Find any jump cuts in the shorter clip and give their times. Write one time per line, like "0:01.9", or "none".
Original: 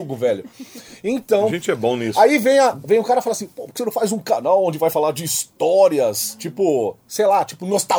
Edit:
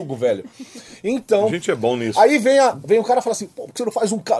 none